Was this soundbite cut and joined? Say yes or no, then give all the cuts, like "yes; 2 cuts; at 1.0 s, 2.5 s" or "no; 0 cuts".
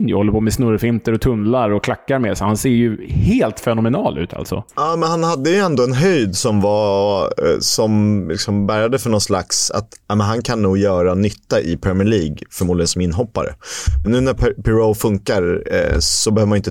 yes; 2 cuts; at 4.7 s, 14.0 s